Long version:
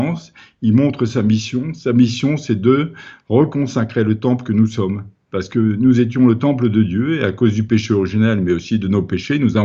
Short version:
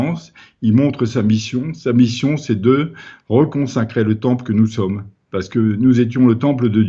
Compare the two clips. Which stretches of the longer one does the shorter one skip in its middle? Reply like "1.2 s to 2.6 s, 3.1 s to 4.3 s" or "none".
none

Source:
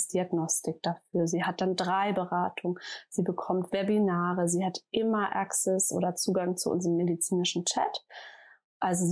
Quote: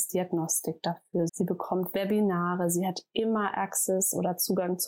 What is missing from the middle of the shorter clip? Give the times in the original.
1.3 s to 3.1 s

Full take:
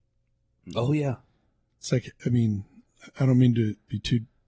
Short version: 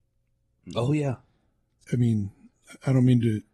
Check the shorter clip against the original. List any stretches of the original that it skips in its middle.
1.8 s to 2.2 s

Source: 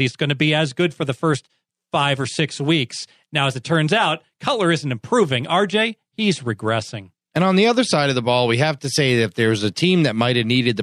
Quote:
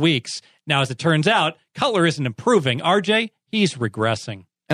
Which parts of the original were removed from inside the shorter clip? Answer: none

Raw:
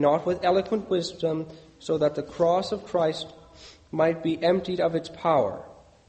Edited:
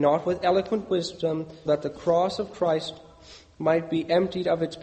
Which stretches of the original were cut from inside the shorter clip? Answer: 1.7 s to 2.0 s

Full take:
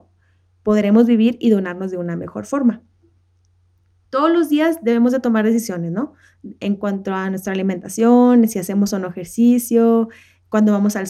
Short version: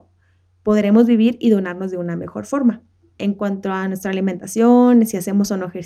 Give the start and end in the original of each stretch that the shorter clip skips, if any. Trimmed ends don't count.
3.2 s to 6.6 s

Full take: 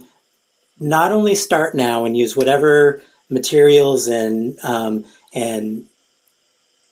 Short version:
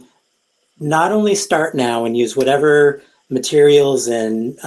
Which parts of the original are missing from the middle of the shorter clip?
none

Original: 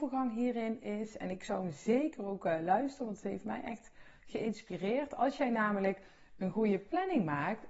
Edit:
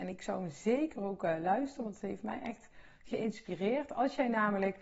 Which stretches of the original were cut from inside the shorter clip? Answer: none

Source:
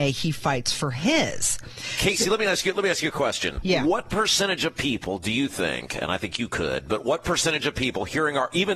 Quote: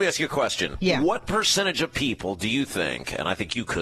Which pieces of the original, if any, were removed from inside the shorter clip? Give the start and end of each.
none

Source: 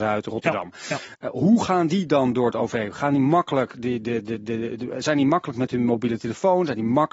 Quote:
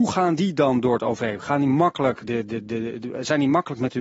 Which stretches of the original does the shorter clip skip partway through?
3.8 s to 4.0 s

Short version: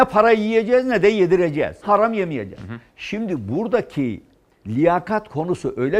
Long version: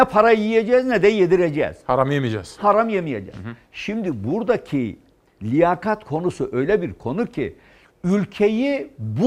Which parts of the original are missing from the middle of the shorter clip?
1.8 s to 2.6 s

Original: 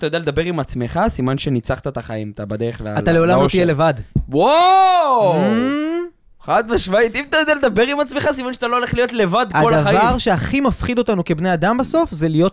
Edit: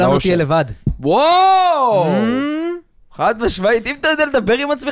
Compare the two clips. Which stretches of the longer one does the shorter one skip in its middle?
none

